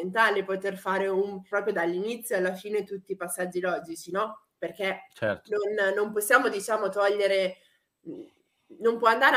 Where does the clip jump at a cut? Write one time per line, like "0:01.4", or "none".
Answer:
0:01.5